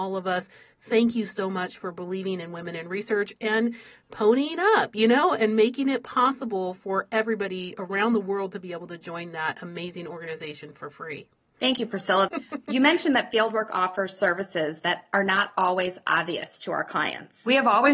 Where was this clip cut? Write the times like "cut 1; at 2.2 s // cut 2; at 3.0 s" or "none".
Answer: cut 1; at 12.3 s